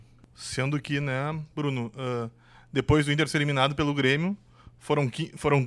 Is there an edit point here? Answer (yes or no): no